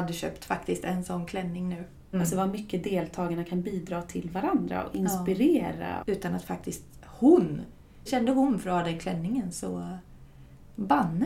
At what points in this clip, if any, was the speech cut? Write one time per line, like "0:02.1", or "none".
0:02.1
0:06.0
0:08.1

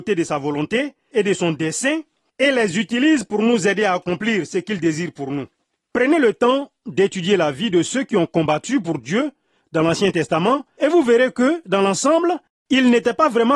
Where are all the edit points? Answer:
none

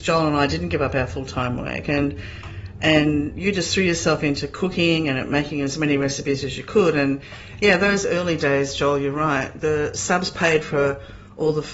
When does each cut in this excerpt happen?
none

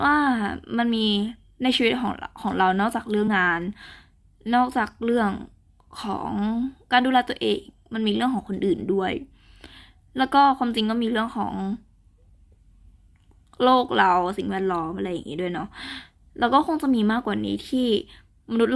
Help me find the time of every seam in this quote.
0:03.3

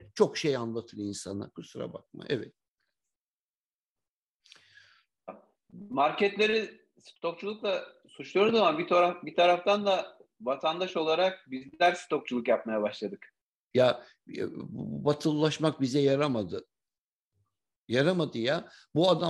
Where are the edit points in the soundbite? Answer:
0:13.7

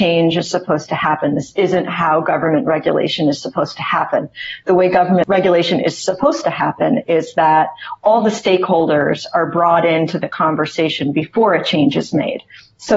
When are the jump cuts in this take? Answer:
none

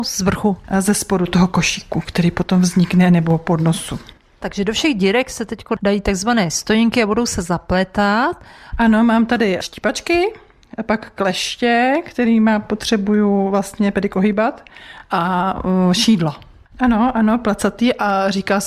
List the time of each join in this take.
0:08.7
0:16.7

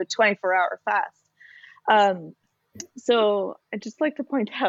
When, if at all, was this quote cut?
none

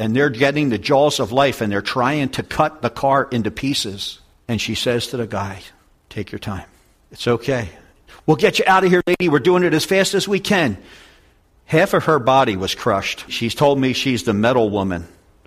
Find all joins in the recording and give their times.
0:05.9

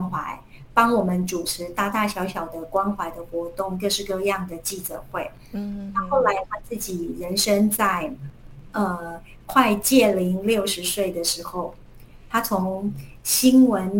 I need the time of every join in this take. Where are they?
none

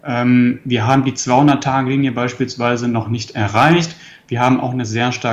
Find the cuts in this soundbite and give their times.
none

